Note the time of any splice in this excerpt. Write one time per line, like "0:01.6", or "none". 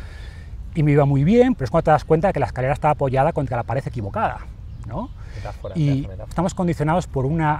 0:01.5
0:06.3